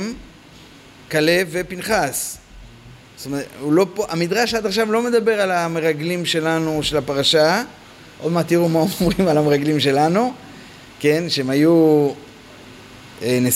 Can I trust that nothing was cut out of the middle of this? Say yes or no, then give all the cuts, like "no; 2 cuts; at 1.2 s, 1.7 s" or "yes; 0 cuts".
yes; 0 cuts